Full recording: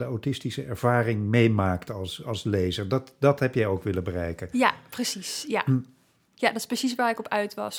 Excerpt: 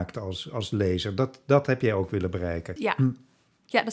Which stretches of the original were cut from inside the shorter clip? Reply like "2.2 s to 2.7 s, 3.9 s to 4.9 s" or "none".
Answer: 4.5 s to 5.4 s